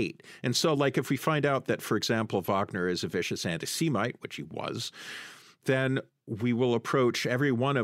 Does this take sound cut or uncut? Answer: uncut